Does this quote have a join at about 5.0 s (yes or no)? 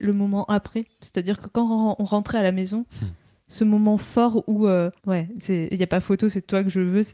yes